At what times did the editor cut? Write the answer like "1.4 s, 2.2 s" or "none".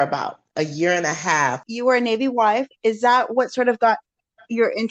1.6 s